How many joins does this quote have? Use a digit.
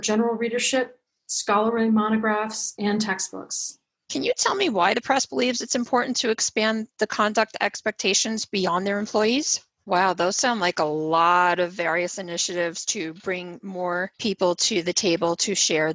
2